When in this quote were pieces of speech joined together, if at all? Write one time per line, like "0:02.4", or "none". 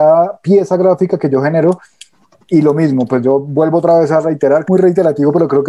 0:04.6